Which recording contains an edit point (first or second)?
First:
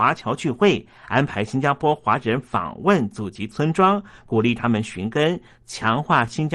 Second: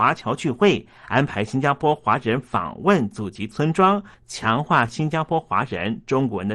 second